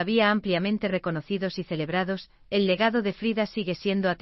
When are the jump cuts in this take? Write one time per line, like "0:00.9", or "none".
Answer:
none